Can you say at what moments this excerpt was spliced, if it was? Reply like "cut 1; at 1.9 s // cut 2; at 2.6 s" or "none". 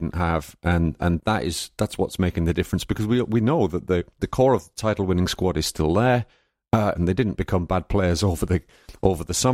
cut 1; at 1.2 s // cut 2; at 7.0 s